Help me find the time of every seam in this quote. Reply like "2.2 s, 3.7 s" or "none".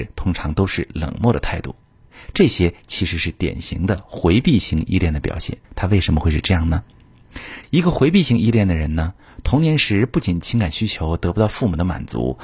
5.6 s, 7.6 s